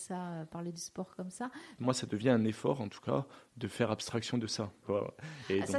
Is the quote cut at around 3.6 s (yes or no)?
no